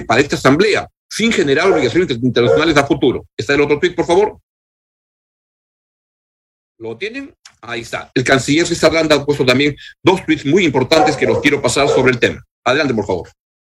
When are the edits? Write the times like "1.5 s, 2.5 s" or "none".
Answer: 8.1 s